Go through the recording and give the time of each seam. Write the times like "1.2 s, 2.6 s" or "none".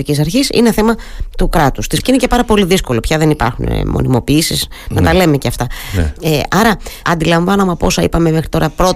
2.0 s, 7.0 s